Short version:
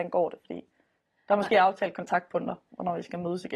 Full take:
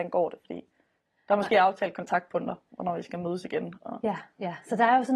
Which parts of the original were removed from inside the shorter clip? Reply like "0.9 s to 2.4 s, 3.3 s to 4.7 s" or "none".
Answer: none